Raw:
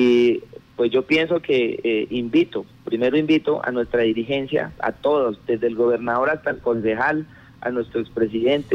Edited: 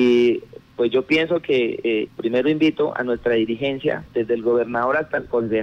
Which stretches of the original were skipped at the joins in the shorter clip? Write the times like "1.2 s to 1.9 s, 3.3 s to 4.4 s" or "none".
2.1 s to 2.8 s, 4.8 s to 5.4 s